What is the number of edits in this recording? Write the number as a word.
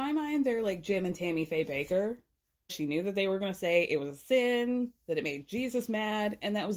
one